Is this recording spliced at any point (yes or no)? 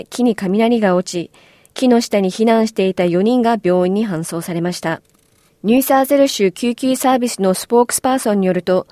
no